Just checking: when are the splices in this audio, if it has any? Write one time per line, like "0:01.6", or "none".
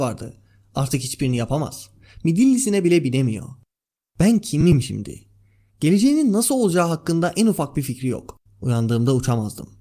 0:08.5